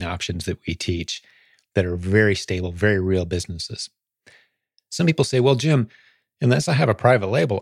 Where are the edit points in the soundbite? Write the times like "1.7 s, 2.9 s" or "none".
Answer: none